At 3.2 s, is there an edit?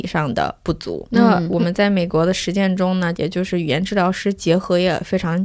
yes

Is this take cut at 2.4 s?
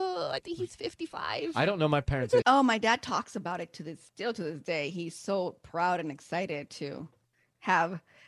yes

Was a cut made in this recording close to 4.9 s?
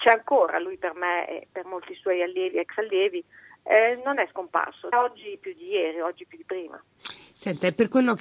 yes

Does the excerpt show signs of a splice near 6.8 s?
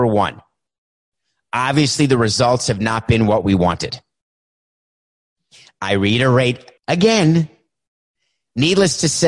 yes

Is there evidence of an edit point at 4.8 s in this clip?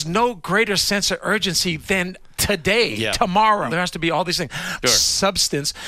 yes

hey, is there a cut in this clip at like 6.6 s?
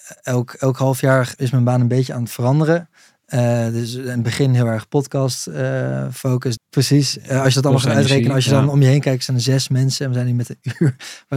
yes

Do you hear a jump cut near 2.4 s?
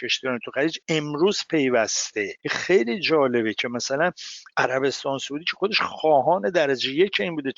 yes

